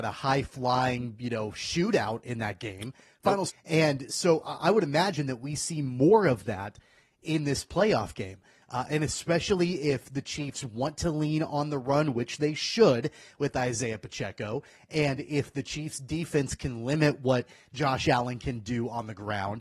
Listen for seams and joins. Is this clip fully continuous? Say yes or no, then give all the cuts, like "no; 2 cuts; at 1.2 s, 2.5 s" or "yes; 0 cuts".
no; 1 cut; at 3.5 s